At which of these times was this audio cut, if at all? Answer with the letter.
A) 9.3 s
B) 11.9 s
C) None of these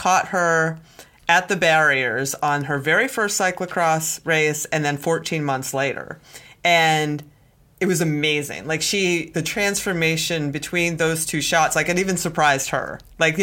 A